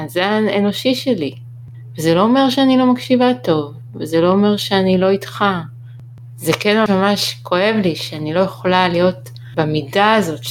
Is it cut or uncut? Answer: cut